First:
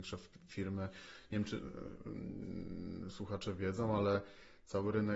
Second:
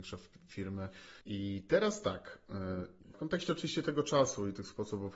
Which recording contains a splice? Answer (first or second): second